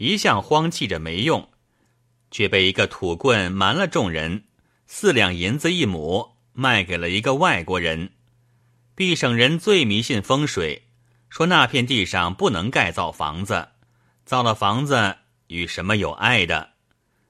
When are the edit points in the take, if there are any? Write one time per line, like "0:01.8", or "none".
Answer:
none